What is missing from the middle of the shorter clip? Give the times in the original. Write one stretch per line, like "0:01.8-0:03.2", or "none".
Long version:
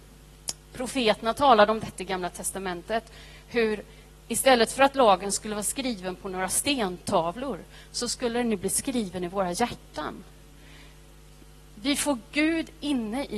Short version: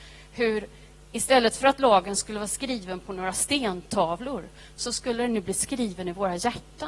none